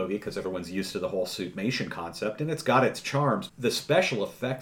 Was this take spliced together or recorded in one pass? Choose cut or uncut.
cut